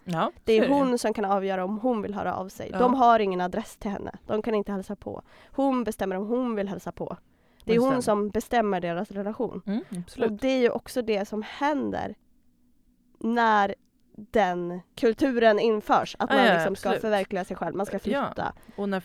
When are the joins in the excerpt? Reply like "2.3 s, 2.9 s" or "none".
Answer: 14.9 s